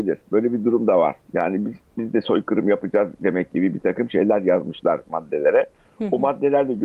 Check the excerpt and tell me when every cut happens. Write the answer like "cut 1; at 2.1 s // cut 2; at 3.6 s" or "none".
cut 1; at 1.2 s